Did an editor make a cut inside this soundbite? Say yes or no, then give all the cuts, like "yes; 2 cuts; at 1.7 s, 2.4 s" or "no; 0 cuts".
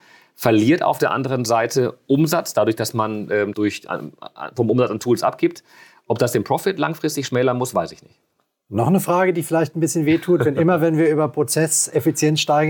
yes; 1 cut; at 3.5 s